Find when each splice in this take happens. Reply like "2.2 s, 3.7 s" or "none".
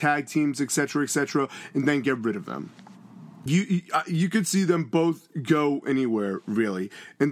3.5 s